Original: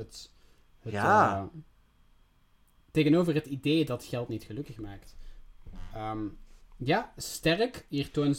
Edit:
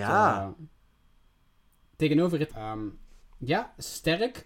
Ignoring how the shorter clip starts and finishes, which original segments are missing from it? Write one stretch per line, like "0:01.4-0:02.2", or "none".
0:03.4-0:05.9